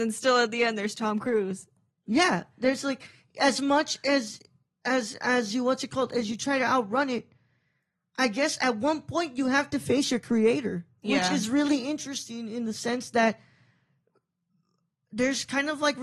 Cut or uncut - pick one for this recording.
uncut